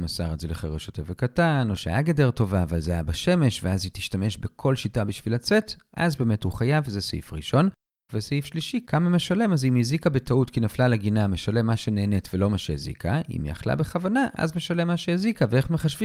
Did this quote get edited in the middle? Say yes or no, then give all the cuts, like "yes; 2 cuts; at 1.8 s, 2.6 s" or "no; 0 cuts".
yes; 1 cut; at 8.1 s